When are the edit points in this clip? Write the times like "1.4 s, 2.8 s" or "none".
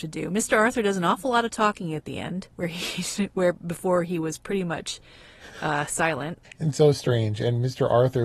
none